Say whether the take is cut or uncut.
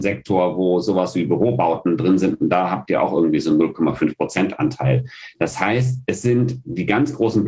uncut